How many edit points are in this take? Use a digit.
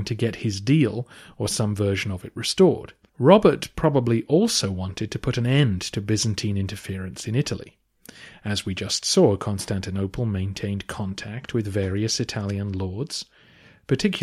1